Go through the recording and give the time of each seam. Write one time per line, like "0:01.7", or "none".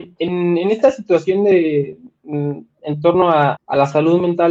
0:03.5